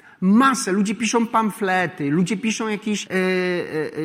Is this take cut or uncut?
cut